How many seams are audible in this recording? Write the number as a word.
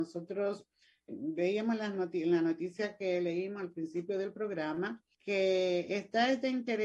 two